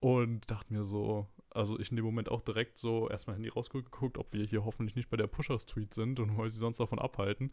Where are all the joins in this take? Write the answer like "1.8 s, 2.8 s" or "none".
none